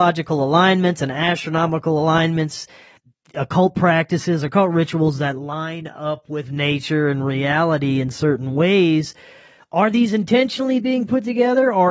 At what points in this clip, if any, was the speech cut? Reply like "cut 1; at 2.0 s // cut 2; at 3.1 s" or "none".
none